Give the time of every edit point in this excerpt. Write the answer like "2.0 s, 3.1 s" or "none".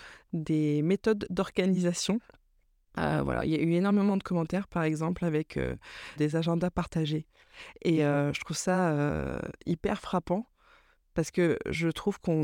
6.2 s